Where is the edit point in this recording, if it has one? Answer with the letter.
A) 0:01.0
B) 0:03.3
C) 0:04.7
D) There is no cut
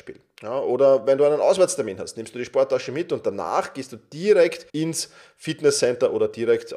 C